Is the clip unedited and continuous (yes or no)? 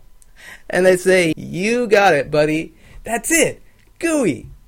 no